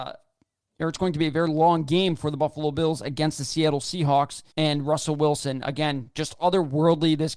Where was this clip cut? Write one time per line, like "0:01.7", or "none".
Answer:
0:04.5